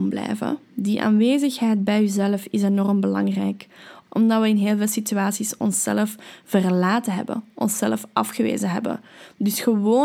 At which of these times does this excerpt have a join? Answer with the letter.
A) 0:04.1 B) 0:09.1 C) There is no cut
A